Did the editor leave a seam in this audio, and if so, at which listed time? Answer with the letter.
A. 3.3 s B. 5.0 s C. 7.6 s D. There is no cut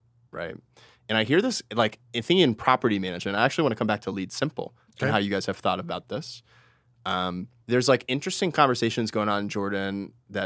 C